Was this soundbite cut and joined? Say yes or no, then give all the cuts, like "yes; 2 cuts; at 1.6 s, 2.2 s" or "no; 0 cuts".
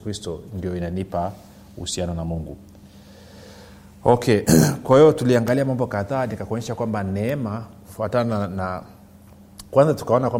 no; 0 cuts